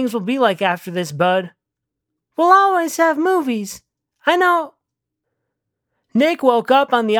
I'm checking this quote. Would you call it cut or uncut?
uncut